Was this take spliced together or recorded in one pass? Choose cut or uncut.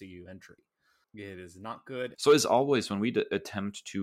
cut